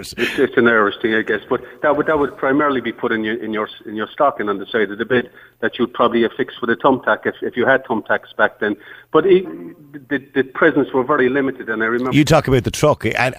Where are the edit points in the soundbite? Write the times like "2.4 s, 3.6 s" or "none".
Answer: 9.4 s, 12.1 s